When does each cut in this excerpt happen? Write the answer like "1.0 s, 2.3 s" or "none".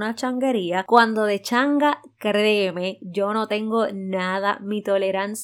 none